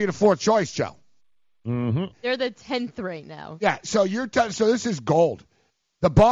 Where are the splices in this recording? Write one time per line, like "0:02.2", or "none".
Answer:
0:02.1